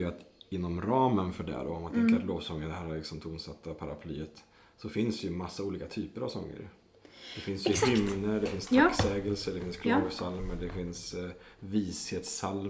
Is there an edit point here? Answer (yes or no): no